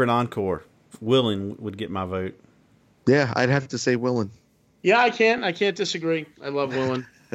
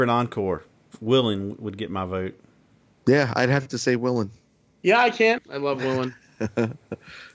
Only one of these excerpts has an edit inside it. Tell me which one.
second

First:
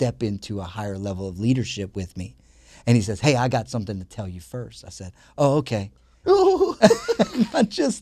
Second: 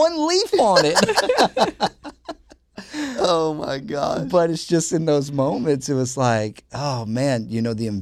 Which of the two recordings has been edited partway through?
first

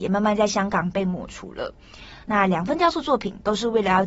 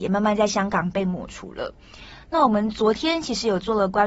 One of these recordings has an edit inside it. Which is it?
first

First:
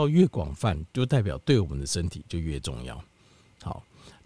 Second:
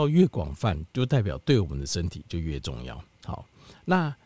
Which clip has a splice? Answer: second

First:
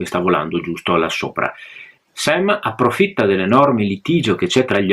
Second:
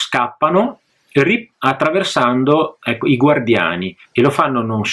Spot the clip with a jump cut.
first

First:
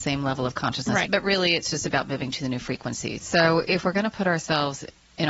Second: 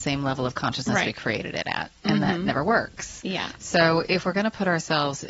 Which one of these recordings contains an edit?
first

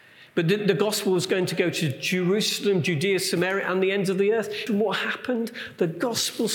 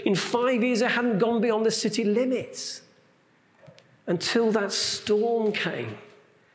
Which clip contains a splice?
first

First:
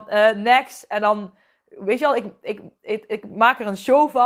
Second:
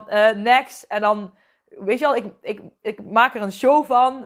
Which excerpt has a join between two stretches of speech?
second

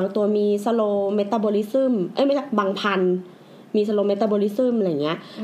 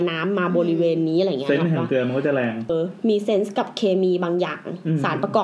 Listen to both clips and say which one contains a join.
second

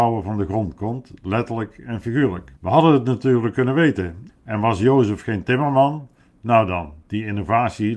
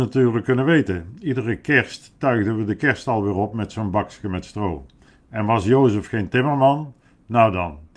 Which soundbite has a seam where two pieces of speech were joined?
first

